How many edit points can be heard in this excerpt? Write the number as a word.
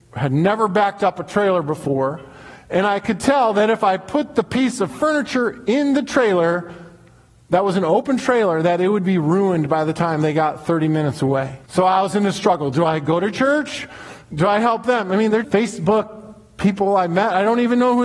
two